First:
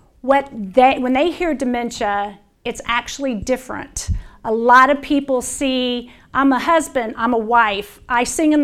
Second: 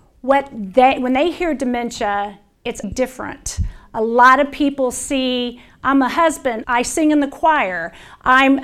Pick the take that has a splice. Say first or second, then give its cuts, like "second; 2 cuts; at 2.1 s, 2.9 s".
second; 2 cuts; at 2.8 s, 6.6 s